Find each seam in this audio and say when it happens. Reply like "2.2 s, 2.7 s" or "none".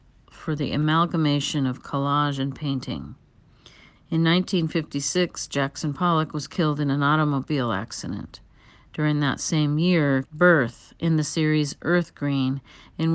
3.9 s, 10.2 s